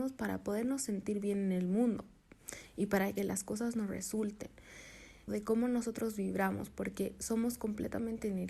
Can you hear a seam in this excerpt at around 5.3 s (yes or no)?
yes